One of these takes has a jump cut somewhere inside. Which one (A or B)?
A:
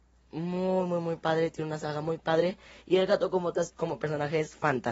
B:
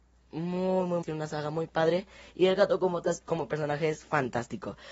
B